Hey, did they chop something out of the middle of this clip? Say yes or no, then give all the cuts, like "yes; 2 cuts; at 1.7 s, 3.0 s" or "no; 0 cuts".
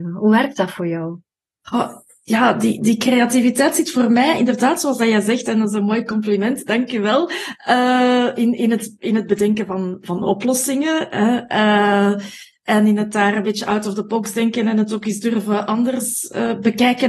no; 0 cuts